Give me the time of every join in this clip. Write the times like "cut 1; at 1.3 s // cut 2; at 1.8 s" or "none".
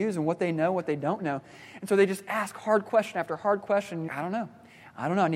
cut 1; at 4.1 s